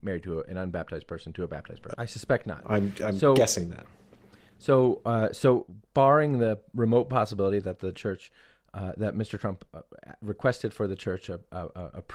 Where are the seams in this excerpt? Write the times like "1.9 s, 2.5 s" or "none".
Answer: 1.9 s